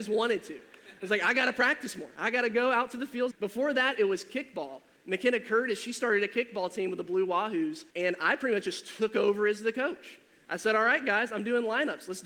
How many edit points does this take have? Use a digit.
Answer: 2